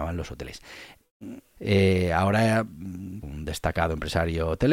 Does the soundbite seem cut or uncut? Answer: cut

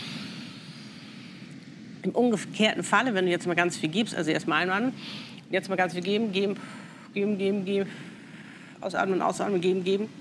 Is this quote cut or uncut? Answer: cut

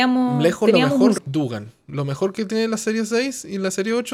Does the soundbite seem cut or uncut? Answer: cut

